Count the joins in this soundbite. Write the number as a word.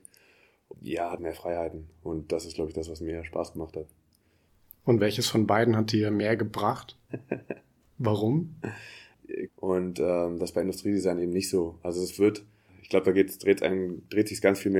three